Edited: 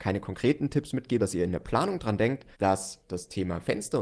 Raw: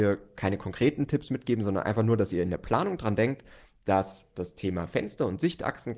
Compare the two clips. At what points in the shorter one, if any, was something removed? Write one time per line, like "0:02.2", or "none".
0:01.2
0:02.5

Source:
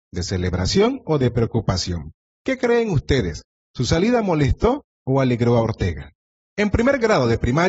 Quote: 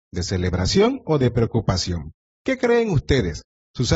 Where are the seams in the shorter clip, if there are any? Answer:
none

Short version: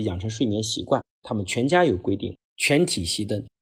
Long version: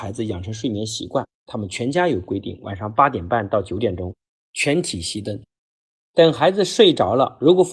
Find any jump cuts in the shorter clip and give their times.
0:02.3

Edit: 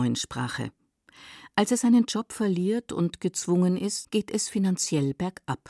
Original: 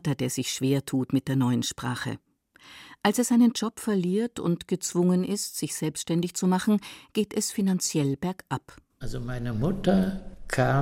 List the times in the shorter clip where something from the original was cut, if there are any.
0:04.0

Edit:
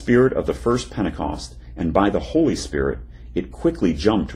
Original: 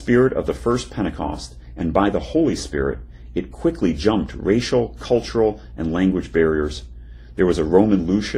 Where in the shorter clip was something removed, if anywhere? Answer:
none

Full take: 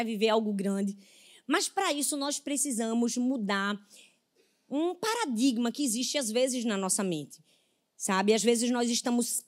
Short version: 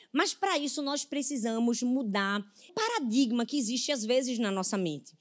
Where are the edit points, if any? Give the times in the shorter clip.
0:02.7

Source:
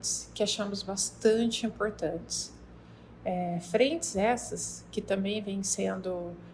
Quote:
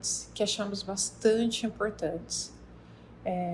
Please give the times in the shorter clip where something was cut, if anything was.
none

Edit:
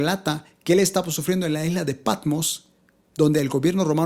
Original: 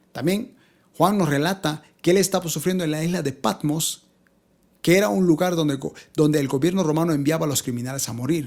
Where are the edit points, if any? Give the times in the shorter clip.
0:03.1

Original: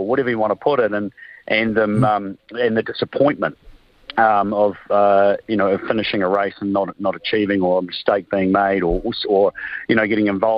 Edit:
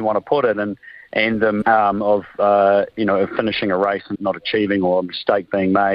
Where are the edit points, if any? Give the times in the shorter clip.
0:01.6
0:04.1

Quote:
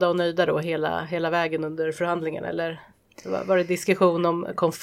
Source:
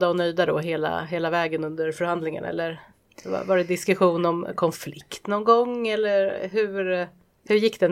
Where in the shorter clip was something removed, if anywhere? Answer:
none

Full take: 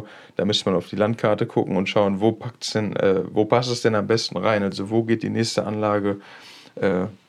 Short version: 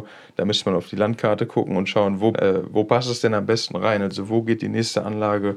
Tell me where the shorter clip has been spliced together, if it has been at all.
0:02.3

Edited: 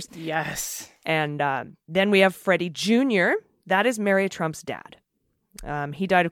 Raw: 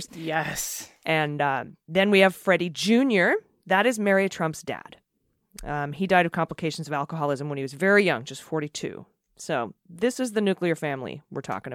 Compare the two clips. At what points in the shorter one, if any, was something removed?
none

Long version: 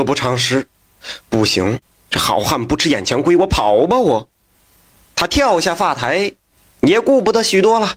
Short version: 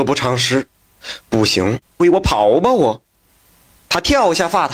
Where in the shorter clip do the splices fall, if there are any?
0:02.0

